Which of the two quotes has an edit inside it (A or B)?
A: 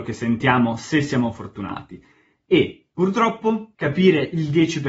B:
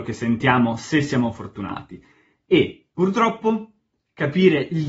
A